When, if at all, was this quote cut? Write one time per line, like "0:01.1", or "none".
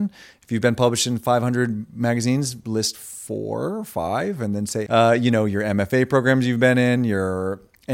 0:04.9